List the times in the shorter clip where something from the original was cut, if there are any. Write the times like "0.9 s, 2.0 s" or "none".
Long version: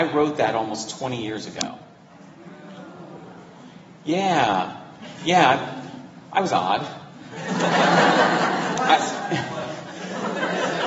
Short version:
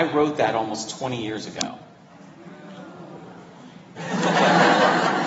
4.0 s